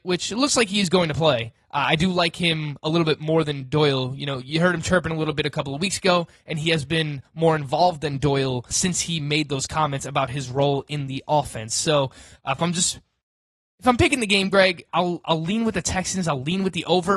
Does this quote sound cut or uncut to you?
cut